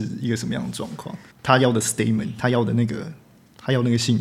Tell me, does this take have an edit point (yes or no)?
yes